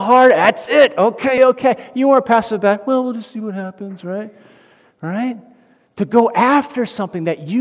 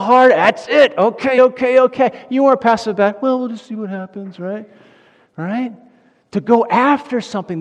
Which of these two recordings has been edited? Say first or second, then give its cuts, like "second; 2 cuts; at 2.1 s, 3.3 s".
first; 1 cut; at 1.4 s